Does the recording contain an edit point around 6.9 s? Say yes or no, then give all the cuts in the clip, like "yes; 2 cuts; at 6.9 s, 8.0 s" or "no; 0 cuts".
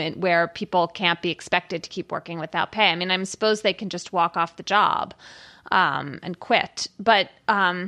no; 0 cuts